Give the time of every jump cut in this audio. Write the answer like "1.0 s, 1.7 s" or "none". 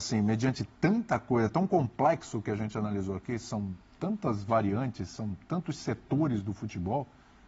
none